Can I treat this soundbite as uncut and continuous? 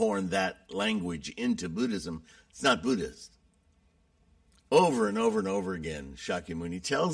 yes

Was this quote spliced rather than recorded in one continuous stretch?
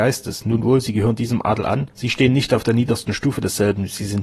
yes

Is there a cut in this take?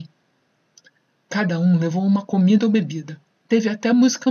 no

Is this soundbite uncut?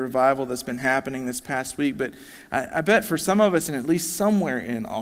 no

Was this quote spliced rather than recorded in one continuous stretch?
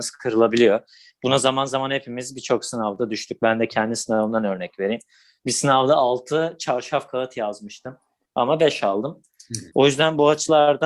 yes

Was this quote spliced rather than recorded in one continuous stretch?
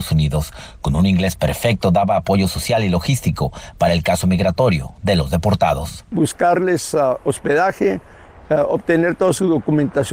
no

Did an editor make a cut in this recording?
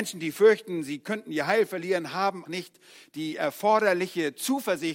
yes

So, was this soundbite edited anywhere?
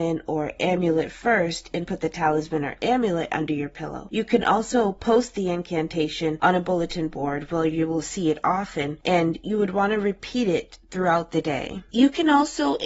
no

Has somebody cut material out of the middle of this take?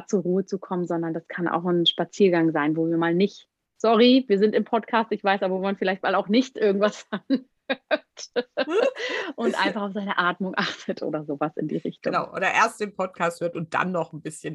no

